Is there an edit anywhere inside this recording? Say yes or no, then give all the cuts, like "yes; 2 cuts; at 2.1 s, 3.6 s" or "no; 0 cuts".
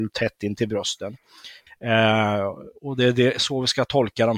yes; 1 cut; at 1.7 s